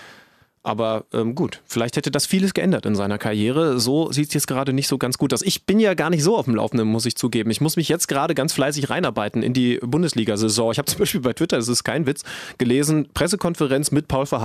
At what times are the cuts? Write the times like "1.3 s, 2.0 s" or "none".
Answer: none